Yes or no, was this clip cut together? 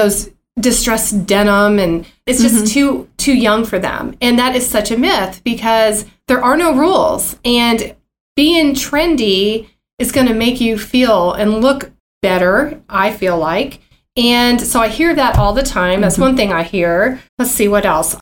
yes